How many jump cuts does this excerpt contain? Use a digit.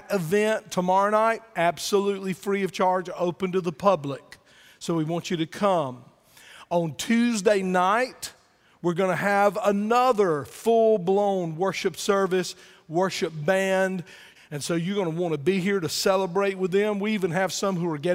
1